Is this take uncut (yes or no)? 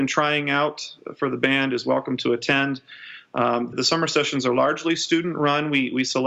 no